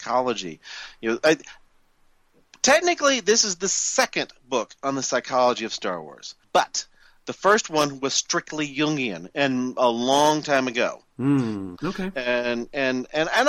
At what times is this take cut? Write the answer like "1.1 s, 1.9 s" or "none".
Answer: 6.4 s, 11.8 s